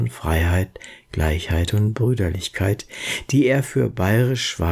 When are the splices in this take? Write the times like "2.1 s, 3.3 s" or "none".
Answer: none